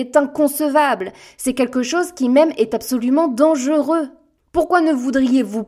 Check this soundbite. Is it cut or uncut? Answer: uncut